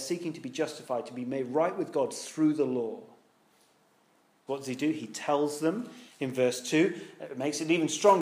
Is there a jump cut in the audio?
yes; 1 cut; at 4.5 s

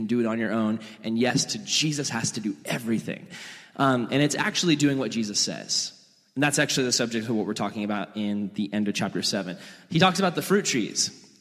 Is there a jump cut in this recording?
no; 0 cuts

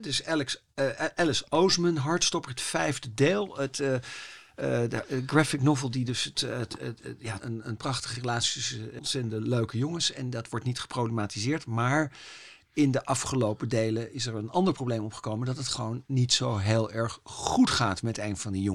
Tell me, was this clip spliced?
yes; 2 cuts; at 7.4 s, 9.0 s

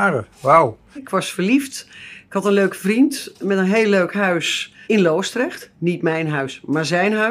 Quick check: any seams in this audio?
yes; 2 cuts; at 1.0 s, 4.8 s

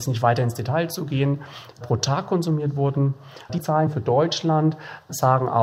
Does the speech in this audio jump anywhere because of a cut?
yes; 1 cut; at 3.5 s

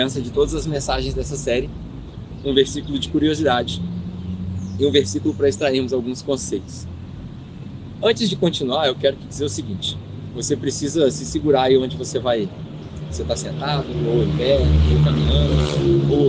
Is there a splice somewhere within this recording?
no; 0 cuts

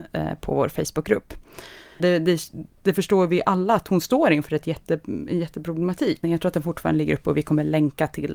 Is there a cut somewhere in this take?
yes; 2 cuts; at 2.0 s, 6.2 s

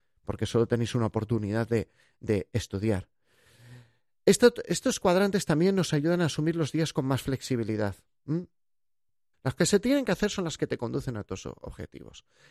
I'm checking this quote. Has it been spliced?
yes; 1 cut; at 9.3 s

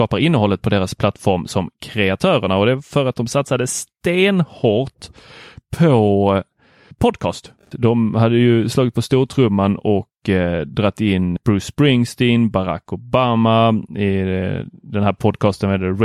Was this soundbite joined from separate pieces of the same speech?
yes; 2 cuts; at 7.7 s, 11.4 s

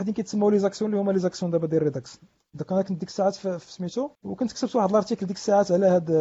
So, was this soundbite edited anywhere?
yes; 1 cut; at 4.2 s

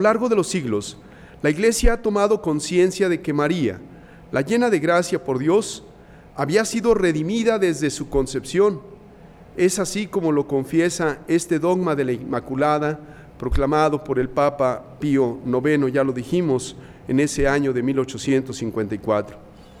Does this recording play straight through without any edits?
yes; 0 cuts

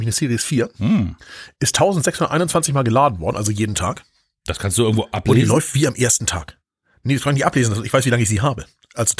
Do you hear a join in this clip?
no; 0 cuts

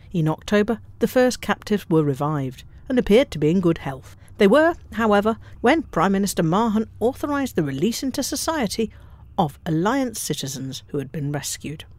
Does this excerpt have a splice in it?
yes; 1 cut; at 5.6 s

